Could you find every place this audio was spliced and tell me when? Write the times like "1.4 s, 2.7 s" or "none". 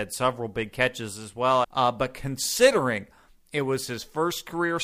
1.6 s